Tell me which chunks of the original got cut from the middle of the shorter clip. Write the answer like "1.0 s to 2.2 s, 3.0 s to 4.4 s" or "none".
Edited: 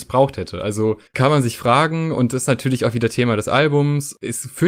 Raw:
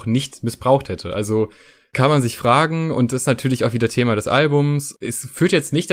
1.6 s to 1.9 s